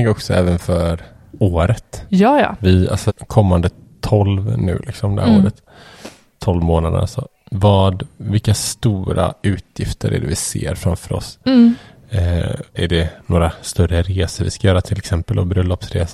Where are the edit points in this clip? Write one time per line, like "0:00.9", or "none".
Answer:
0:03.1
0:12.8